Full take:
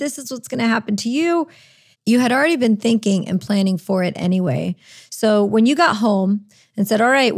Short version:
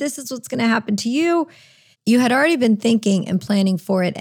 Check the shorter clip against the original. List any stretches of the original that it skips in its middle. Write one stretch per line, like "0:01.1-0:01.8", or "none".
none

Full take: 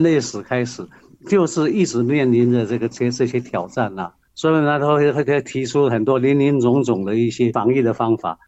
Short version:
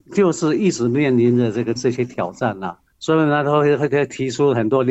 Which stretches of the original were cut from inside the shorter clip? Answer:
0:02.9-0:03.1

